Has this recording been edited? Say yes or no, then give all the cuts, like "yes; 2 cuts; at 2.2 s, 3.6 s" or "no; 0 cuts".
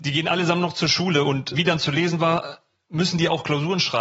no; 0 cuts